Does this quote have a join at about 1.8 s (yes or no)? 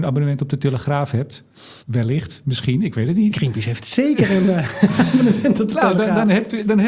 yes